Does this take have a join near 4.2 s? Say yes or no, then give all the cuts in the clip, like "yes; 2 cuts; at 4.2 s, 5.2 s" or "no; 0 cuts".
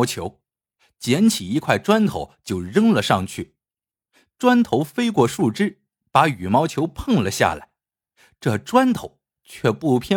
no; 0 cuts